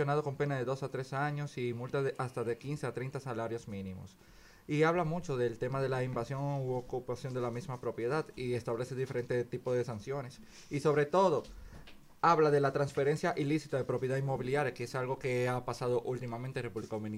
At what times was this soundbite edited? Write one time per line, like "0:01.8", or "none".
none